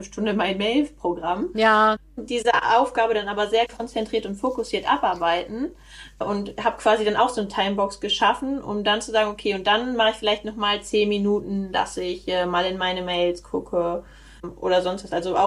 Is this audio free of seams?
yes; 0 cuts

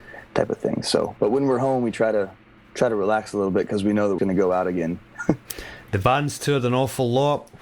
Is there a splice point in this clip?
yes; 2 cuts; at 4.2 s, 5.9 s

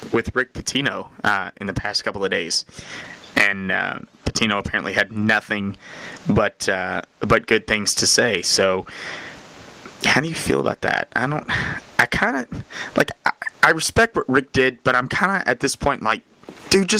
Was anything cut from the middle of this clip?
no; 0 cuts

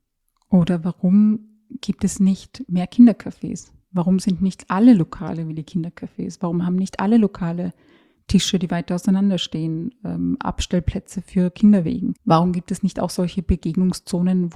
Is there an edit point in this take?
yes; 1 cut; at 12.2 s

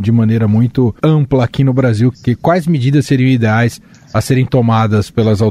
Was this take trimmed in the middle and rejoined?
yes; 2 cuts; at 1.0 s, 2.1 s

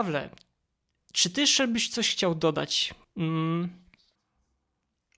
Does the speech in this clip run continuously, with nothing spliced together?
no; 1 cut; at 3.0 s

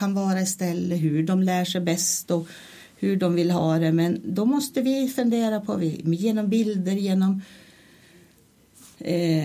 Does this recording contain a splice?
no; 0 cuts

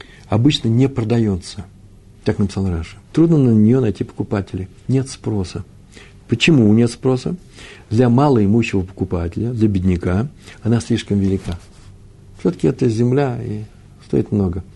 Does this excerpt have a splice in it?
yes; 1 cut; at 3.0 s

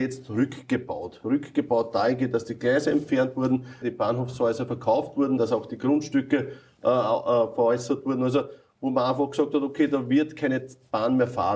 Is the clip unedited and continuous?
no; 1 cut; at 3.8 s

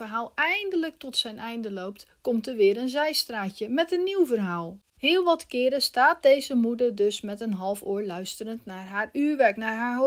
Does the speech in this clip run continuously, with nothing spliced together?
yes; 0 cuts

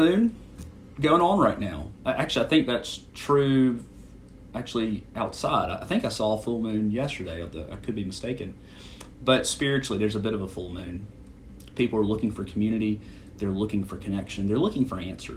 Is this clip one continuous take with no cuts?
yes; 0 cuts

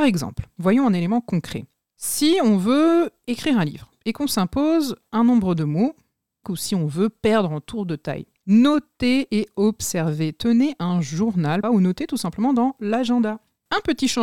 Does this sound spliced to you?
yes; 2 cuts; at 6.4 s, 11.6 s

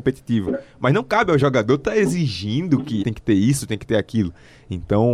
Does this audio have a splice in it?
yes; 1 cut; at 3.0 s

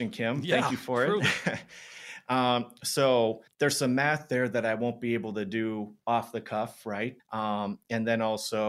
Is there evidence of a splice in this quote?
yes; 2 cuts; at 3.5 s, 7.2 s

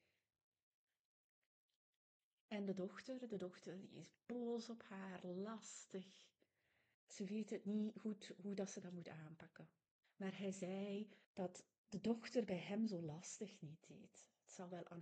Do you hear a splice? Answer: yes; 3 cuts; at 6.9 s, 10.0 s, 11.2 s

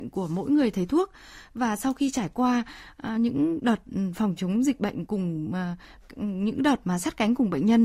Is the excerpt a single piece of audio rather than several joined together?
yes; 0 cuts

